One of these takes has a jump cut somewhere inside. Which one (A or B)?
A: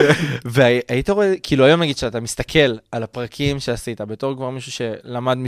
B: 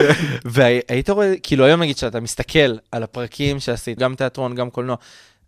B